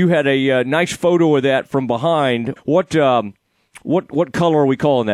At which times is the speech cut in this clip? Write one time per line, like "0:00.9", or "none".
0:02.6